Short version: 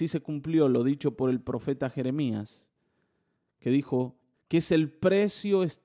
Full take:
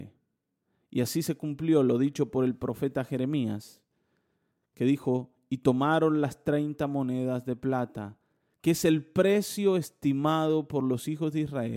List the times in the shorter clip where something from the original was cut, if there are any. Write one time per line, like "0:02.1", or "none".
0:04.3